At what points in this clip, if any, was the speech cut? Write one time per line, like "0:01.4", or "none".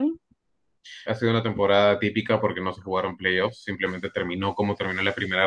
0:01.1